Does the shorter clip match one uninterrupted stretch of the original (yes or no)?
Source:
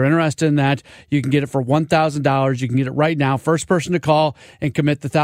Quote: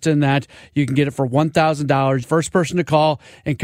no